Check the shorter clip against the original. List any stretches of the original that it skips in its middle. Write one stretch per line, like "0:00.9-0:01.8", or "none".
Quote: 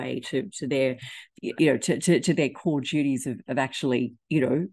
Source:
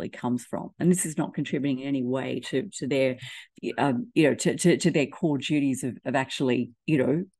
0:03.8-0:04.1

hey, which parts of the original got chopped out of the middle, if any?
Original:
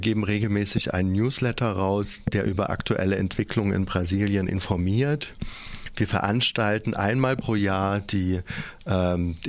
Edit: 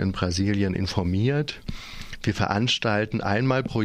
none

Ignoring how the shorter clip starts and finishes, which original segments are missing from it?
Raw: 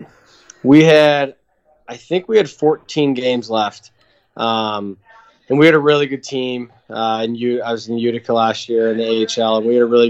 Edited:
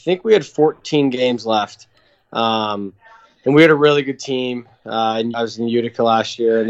0:07.4-0:07.6

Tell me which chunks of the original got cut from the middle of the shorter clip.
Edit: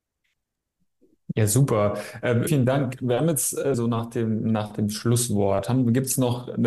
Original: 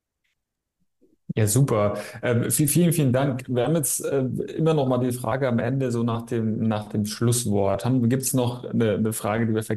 0:02.5-0:02.9
0:04.2-0:05.9

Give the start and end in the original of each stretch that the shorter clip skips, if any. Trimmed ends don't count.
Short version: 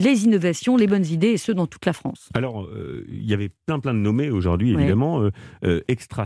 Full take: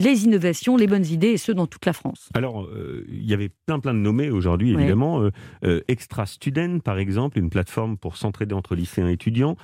none

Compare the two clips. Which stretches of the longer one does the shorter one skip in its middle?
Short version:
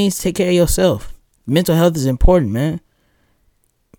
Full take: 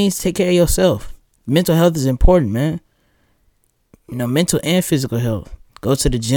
none

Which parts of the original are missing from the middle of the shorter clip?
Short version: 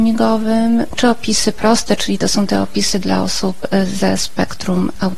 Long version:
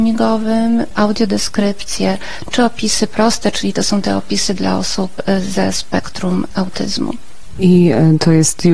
0:00.9-0:02.5

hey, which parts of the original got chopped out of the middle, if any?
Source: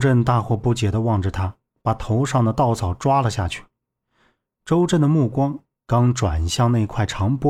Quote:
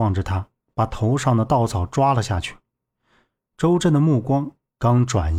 none

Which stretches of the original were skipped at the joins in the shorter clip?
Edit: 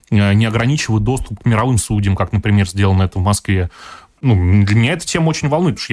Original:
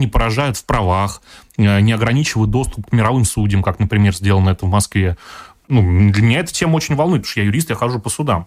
none

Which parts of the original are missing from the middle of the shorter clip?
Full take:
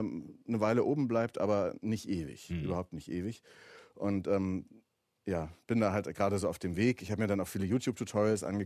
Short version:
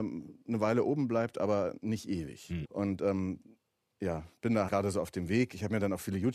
0:02.6-0:03.9
0:05.9-0:06.1

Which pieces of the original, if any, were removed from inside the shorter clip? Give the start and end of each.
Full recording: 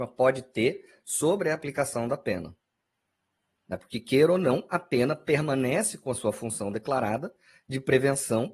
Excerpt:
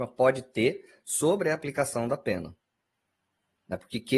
none

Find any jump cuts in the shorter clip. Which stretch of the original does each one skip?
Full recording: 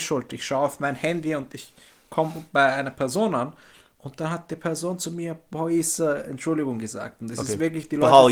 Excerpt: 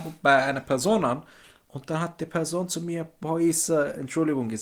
none

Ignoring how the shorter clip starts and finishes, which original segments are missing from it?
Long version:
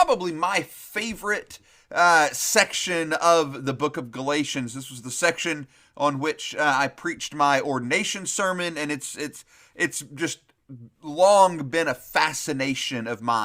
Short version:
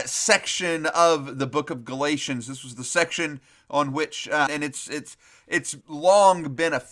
0:06.7-0:08.7
0:10.1-0:10.9

